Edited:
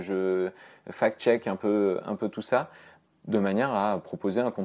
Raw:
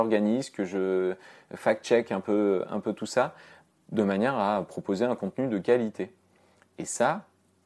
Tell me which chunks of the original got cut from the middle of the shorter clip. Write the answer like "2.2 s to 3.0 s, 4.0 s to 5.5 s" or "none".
none